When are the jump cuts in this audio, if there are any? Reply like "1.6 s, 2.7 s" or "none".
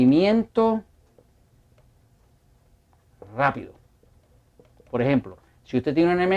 none